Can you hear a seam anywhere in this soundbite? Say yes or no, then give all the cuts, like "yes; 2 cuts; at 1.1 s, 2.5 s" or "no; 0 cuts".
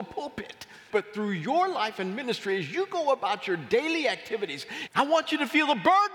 yes; 2 cuts; at 0.9 s, 4.9 s